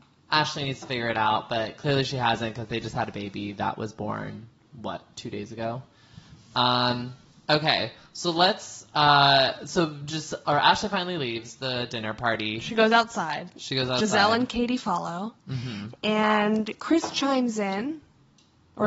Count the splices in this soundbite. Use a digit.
0